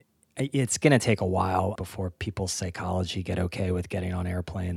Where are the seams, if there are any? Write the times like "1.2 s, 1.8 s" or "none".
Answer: 1.8 s